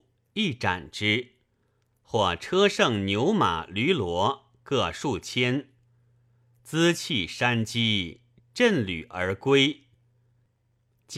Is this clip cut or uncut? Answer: uncut